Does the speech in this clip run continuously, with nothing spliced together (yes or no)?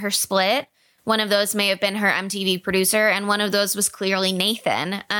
yes